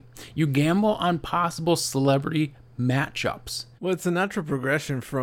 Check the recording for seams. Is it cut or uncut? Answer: cut